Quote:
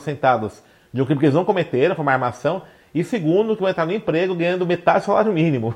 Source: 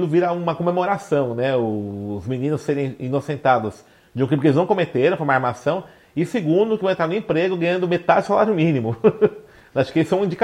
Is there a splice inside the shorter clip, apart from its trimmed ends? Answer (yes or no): no